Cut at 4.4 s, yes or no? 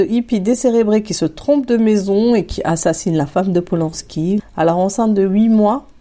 yes